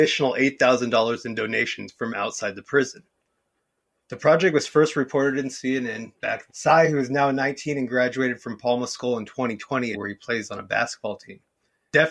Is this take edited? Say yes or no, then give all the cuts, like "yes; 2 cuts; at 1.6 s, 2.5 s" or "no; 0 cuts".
yes; 2 cuts; at 6.5 s, 9.9 s